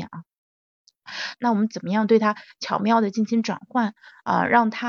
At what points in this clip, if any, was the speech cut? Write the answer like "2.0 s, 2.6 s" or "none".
1.4 s